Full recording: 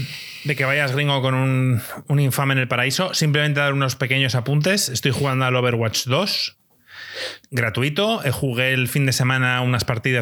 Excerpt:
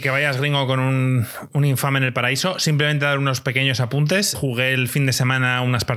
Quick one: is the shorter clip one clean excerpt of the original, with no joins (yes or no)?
no